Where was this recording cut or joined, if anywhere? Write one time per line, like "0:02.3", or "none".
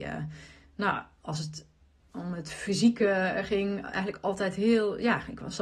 none